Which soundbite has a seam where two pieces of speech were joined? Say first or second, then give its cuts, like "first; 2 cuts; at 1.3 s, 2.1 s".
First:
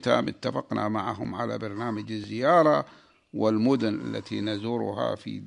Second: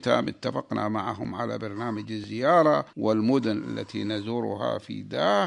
second; 1 cut; at 2.9 s